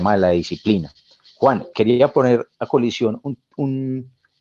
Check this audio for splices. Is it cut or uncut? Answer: uncut